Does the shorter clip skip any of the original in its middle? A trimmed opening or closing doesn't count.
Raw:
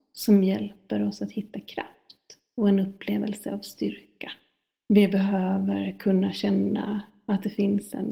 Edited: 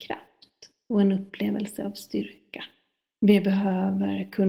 no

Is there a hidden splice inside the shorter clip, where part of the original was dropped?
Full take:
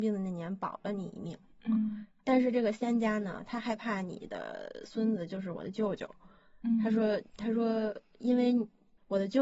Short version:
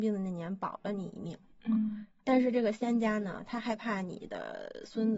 no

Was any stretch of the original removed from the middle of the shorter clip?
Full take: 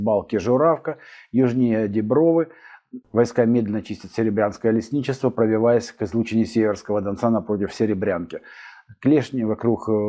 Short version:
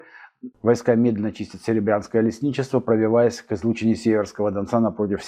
no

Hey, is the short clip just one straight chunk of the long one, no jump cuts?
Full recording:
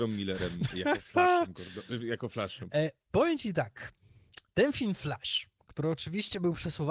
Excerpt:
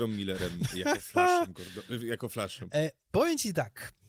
yes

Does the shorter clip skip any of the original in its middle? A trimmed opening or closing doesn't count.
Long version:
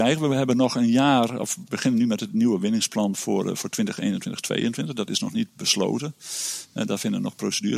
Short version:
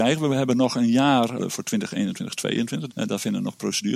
yes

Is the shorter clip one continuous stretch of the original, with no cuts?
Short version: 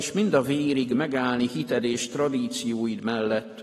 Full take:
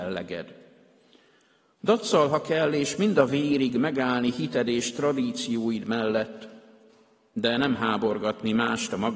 yes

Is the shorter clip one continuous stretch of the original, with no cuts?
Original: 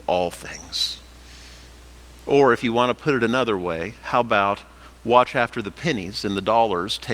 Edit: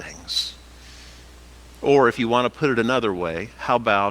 yes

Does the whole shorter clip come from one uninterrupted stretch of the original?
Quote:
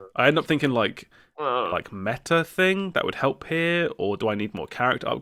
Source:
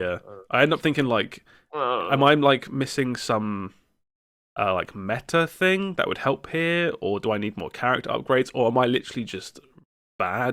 no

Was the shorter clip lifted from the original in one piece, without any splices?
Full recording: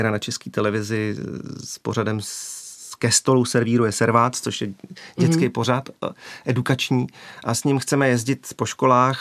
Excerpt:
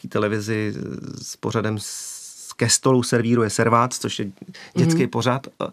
yes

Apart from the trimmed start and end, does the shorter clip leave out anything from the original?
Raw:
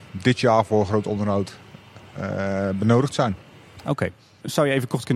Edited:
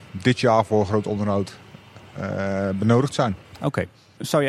yes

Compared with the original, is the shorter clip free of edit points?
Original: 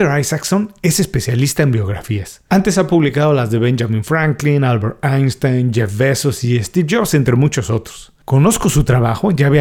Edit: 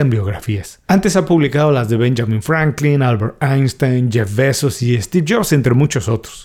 yes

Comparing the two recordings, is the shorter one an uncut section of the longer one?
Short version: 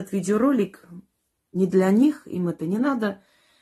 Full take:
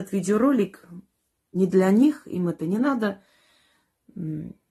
yes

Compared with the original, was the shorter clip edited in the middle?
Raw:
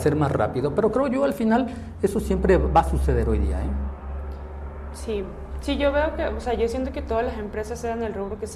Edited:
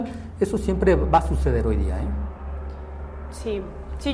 no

